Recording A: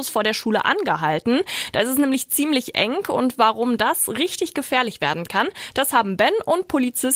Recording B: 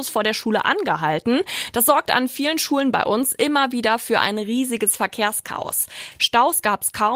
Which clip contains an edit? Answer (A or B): B